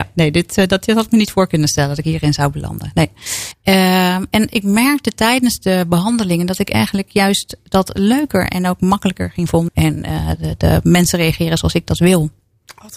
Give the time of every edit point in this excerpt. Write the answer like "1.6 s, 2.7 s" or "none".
3.5 s, 9.7 s